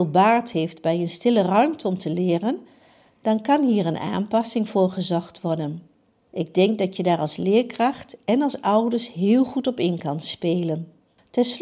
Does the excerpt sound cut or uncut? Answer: uncut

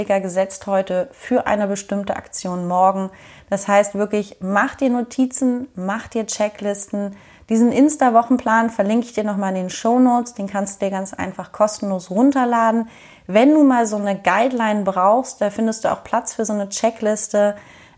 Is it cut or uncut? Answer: uncut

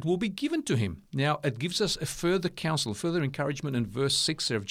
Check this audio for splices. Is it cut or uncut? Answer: uncut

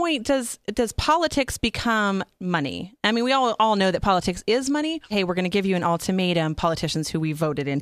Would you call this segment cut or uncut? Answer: cut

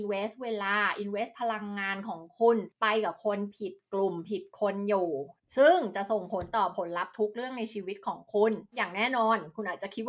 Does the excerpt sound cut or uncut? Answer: uncut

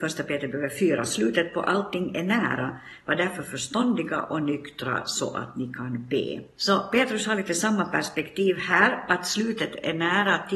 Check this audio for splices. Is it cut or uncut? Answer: cut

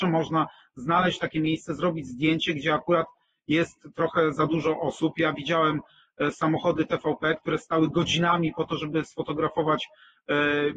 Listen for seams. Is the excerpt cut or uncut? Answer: uncut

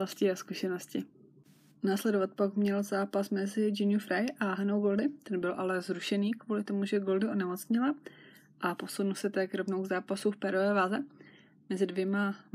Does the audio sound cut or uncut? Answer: uncut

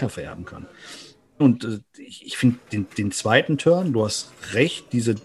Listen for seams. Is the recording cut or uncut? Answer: cut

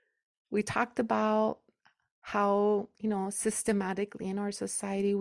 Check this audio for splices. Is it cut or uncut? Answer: uncut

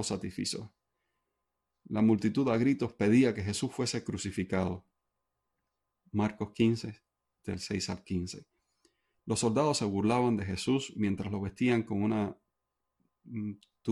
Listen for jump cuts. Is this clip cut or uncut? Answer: uncut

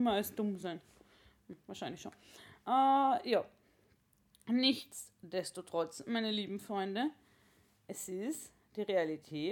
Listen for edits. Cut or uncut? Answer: uncut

